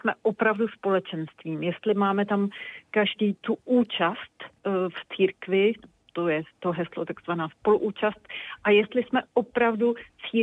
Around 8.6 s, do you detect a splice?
no; 1 cut; at 4.6 s

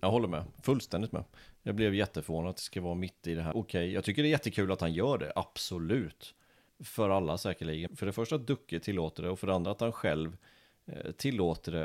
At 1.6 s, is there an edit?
no; 3 cuts; at 3.5 s, 6.7 s, 7.9 s

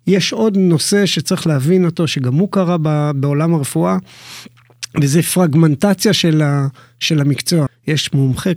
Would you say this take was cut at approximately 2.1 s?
no; 1 cut; at 7.7 s

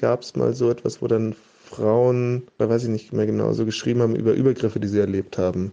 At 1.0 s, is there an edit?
no; 1 cut; at 2.6 s

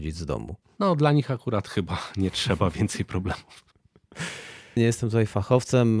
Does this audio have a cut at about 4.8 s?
yes; 1 cut; at 4.8 s

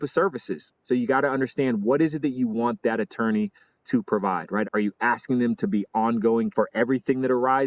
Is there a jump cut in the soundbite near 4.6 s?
yes; 2 cuts; at 4.6 s, 6.5 s

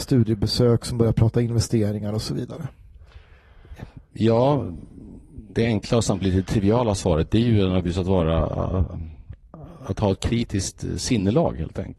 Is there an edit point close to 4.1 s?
no; 1 cut; at 5.5 s

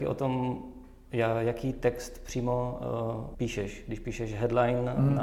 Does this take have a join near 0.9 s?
no; 1 cut; at 3.3 s

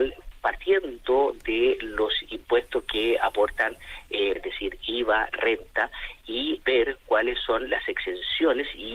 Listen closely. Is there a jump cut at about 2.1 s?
no; 2 cuts; at 4.4 s, 6.6 s

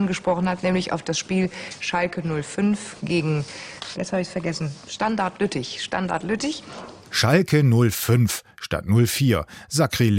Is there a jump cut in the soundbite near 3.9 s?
yes; 1 cut; at 3.9 s

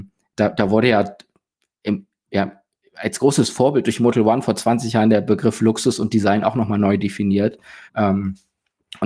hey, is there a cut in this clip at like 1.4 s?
no; 1 cut; at 7.9 s

